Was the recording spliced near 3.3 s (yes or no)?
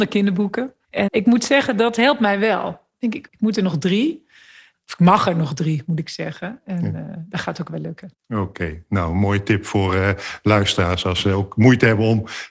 yes